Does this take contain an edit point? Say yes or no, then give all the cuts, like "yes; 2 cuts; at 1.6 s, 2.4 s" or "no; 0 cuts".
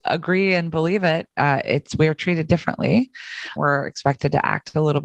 yes; 1 cut; at 3.6 s